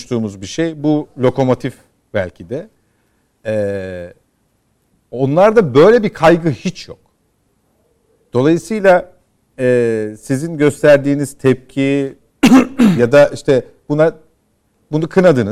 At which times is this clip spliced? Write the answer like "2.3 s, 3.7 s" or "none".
none